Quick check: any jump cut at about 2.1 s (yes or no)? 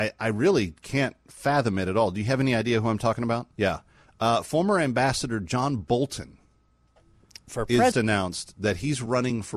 no